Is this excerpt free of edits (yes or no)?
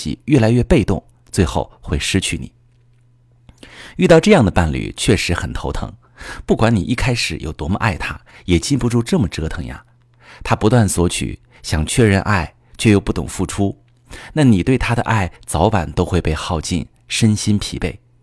yes